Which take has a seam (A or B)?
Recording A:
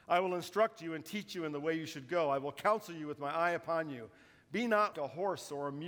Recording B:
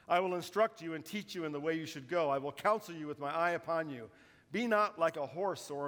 A